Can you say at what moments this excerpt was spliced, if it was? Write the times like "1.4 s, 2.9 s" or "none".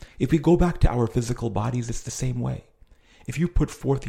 none